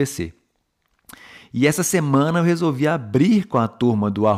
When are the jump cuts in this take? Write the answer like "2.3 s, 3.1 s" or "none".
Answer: none